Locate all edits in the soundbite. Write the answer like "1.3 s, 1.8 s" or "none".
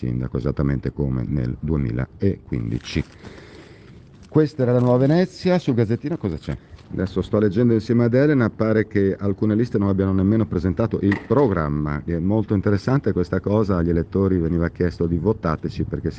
6.8 s, 12.1 s